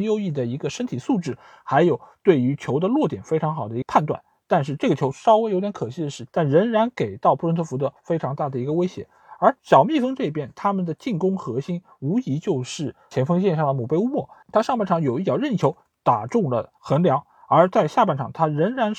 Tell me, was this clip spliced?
yes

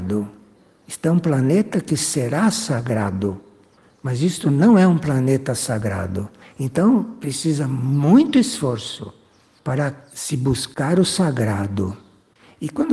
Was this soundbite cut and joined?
no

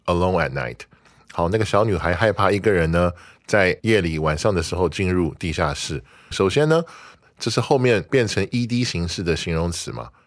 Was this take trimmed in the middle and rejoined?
yes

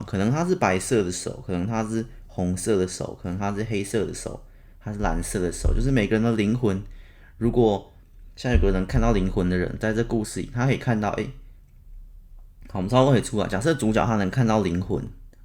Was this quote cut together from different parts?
no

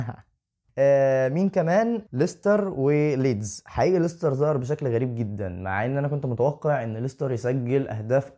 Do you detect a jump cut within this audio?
no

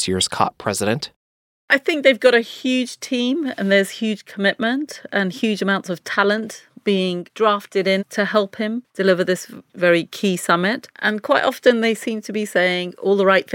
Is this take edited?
yes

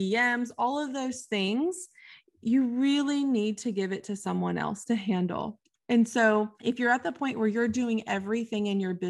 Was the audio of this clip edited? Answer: yes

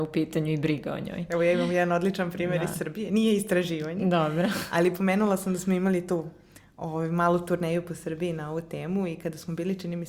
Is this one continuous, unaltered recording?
yes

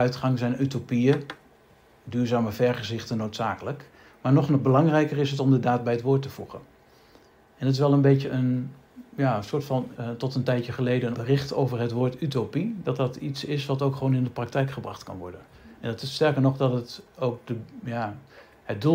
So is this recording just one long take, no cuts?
no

